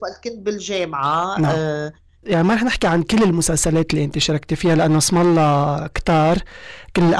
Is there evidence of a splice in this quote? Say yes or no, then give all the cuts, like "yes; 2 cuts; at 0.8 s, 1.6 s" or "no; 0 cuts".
yes; 1 cut; at 2.2 s